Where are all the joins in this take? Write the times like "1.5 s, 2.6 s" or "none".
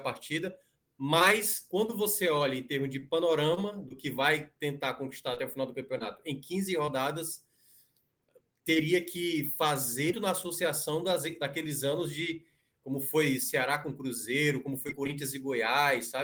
10.1 s